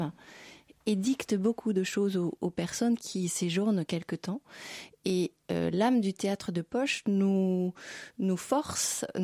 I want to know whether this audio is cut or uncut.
uncut